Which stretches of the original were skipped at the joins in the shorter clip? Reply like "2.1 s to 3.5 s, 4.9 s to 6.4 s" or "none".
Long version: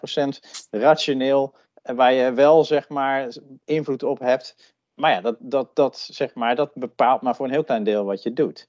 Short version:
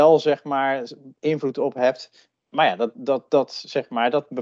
none